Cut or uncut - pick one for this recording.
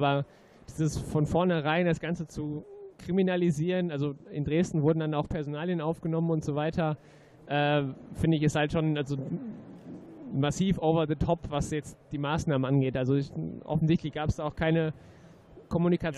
uncut